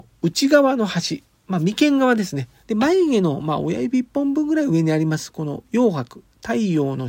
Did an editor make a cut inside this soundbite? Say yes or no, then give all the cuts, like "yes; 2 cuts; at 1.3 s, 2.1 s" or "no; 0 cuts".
yes; 1 cut; at 2.6 s